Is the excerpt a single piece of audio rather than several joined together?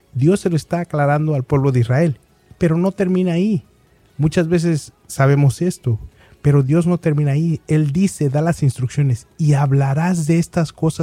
yes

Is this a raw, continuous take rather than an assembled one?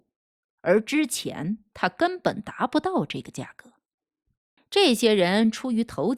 no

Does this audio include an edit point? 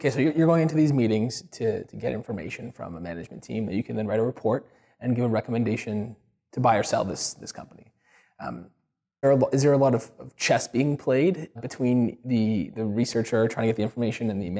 yes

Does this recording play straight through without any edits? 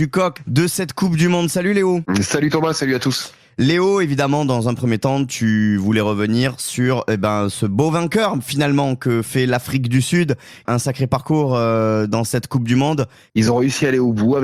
no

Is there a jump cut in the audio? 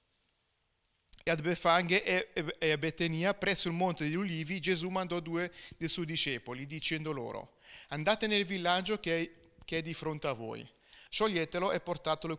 yes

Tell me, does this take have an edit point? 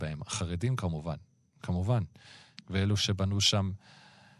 no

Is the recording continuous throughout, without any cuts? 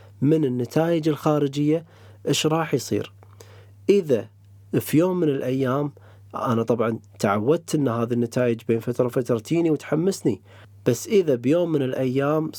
yes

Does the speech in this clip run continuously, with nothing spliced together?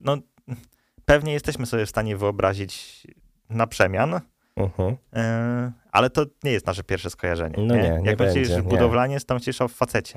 yes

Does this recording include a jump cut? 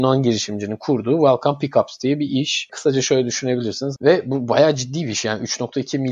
yes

